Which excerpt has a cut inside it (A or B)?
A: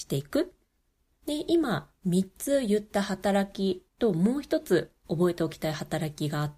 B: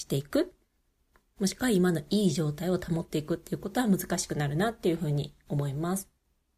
A